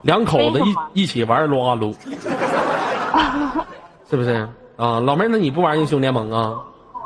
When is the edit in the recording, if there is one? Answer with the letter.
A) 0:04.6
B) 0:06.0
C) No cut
C